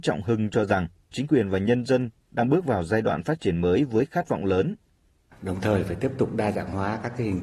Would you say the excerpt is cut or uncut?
cut